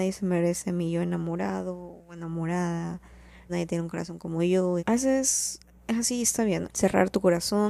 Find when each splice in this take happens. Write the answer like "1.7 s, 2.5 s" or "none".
3.5 s, 4.8 s, 6.6 s